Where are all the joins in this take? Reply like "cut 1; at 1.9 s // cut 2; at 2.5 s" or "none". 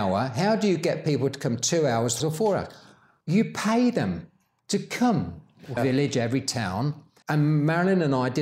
cut 1; at 2.2 s // cut 2; at 5.8 s // cut 3; at 7.2 s

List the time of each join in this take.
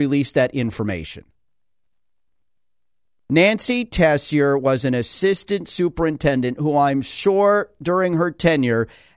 none

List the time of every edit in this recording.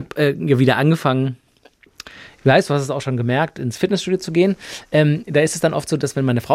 none

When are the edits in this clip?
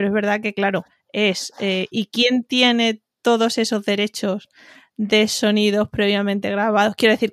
none

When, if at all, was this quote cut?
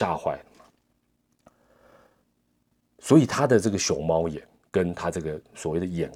none

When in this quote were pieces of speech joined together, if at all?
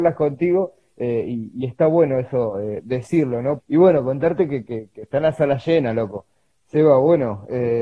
cut 1; at 3.6 s // cut 2; at 6.5 s

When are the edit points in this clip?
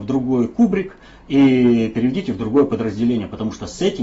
none

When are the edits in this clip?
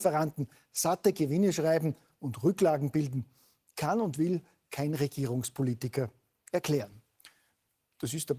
none

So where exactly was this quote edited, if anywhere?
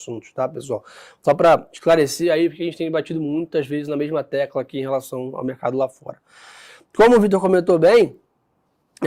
none

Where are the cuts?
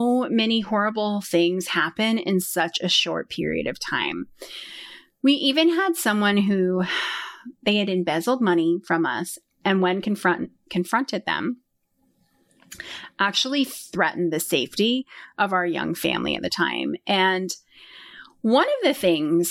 none

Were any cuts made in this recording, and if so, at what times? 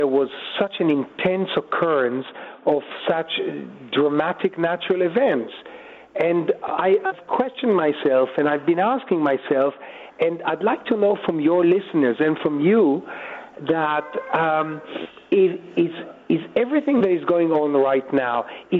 none

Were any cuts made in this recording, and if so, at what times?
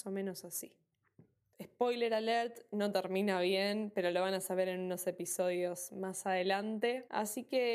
cut 1; at 1.5 s

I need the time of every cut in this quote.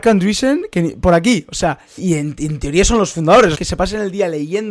cut 1; at 2.0 s // cut 2; at 3.5 s

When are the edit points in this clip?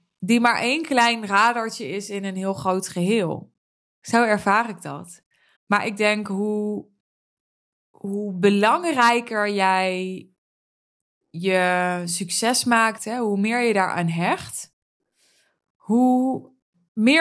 cut 1; at 3.9 s // cut 2; at 5.6 s // cut 3; at 13.0 s

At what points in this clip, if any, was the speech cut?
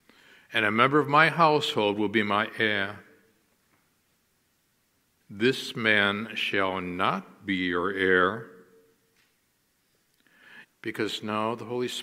cut 1; at 5.2 s // cut 2; at 10.6 s

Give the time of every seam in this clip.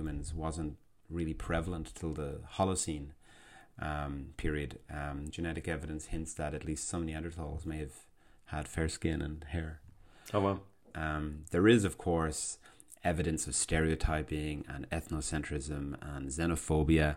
cut 1; at 5.3 s // cut 2; at 10.9 s

